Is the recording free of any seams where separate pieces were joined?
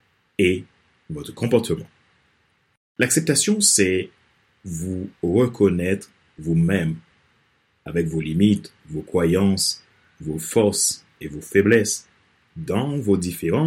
yes; 0 cuts

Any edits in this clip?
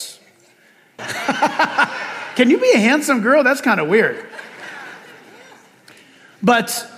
yes; 1 cut; at 1.0 s

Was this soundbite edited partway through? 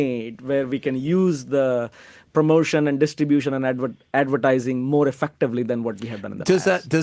no; 0 cuts

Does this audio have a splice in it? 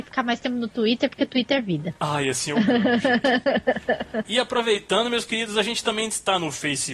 no; 0 cuts

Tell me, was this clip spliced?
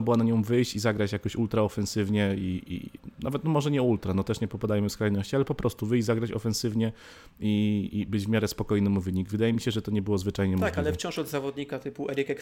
no; 0 cuts

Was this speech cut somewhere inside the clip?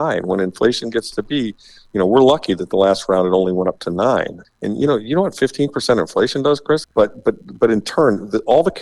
yes; 2 cuts; at 4.4 s, 6.8 s

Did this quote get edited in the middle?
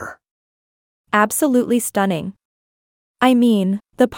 yes; 1 cut; at 3.1 s

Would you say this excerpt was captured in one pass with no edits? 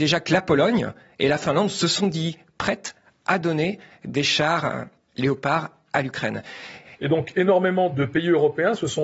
no; 1 cut; at 6.9 s

